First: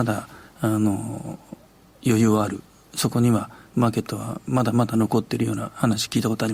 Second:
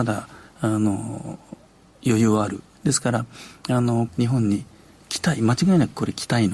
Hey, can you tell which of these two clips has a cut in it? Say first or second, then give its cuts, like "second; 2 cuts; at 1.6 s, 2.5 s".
second; 2 cuts; at 2.7 s, 4.1 s